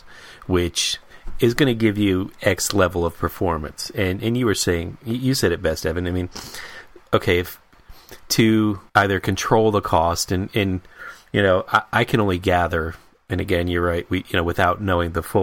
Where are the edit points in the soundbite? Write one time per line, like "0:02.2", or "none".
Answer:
0:08.9